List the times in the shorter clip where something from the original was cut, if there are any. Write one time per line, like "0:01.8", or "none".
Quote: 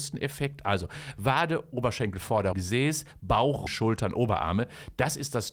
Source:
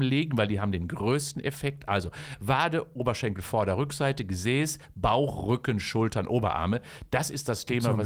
0:02.5
0:03.7